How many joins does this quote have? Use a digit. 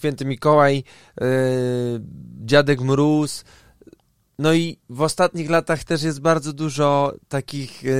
0